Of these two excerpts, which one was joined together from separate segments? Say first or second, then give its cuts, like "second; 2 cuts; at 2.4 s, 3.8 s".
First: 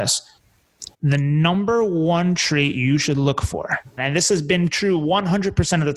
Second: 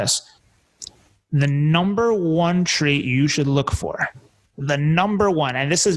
first; 2 cuts; at 0.9 s, 4.0 s